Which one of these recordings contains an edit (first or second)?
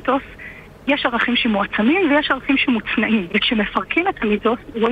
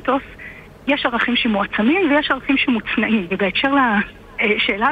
first